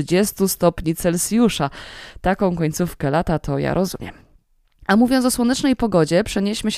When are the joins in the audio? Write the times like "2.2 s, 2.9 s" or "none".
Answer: none